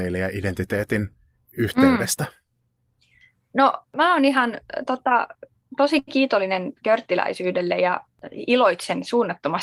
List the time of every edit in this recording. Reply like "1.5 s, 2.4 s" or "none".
none